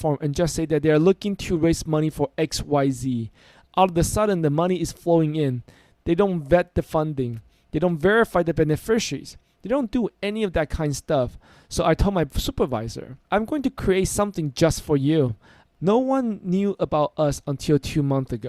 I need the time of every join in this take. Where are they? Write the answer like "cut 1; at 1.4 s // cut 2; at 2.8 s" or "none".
cut 1; at 13.2 s // cut 2; at 15.7 s